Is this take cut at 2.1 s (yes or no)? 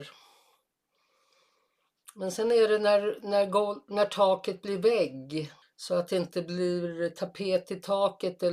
no